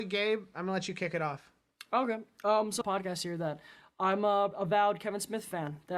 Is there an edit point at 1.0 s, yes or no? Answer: no